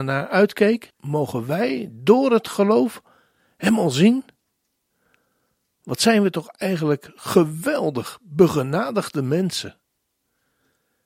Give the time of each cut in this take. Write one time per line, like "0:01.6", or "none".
0:00.9